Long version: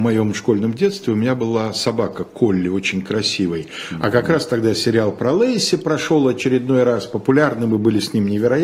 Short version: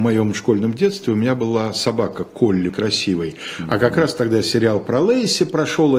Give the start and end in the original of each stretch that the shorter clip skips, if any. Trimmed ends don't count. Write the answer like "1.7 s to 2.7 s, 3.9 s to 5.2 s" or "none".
2.7 s to 3.0 s